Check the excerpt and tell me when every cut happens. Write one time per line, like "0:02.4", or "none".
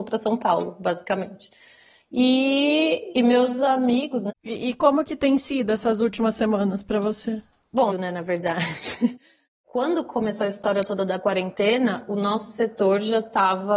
0:04.3
0:07.9